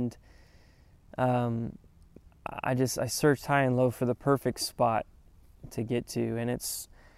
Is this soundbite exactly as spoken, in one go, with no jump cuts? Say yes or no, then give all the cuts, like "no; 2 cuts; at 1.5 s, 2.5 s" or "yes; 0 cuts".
no; 1 cut; at 5.7 s